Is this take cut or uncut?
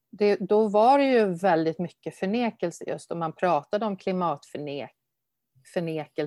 uncut